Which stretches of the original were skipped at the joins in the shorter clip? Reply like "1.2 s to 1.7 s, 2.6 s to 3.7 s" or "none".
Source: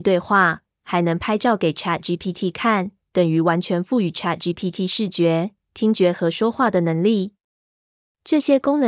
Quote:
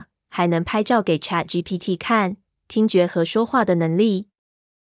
3.1 s to 5.6 s